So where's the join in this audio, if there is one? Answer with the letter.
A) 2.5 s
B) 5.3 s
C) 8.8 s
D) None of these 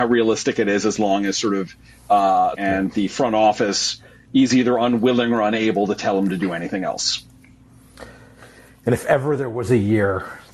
A